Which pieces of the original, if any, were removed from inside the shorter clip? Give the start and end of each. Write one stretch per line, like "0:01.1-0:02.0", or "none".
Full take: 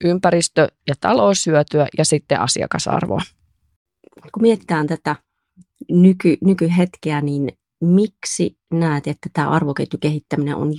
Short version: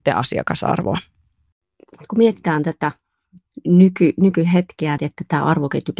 0:07.2-0:09.0